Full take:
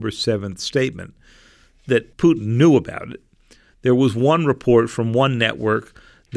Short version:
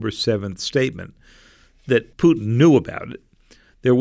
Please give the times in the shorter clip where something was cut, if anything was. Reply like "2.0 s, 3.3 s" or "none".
none